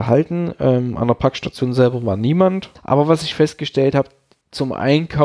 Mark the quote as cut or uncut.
cut